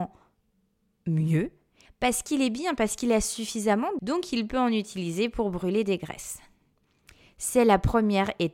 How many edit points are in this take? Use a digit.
2